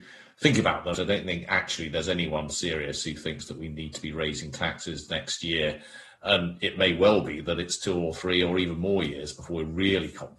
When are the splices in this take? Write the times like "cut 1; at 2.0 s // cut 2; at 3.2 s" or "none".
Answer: cut 1; at 0.9 s